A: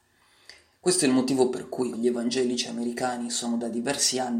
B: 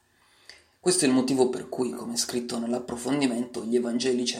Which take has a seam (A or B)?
A